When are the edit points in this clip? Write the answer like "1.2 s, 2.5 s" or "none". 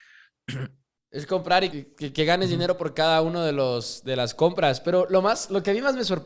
1.7 s